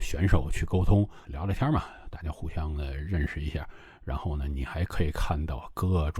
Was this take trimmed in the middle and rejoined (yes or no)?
yes